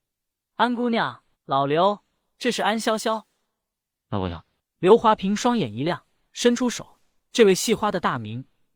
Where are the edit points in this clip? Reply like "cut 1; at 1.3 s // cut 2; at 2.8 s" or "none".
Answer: cut 1; at 1.3 s